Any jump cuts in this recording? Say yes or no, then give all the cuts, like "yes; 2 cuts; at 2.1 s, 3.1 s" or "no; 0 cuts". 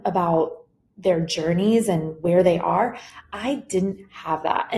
no; 0 cuts